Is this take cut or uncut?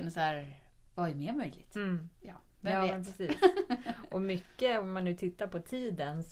uncut